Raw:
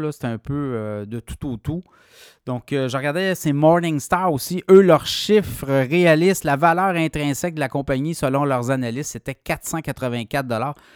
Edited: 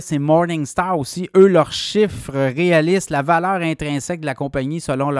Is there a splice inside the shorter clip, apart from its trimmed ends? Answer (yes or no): no